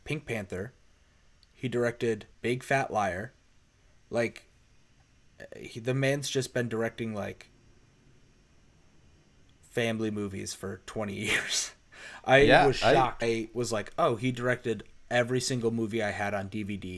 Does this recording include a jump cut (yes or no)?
yes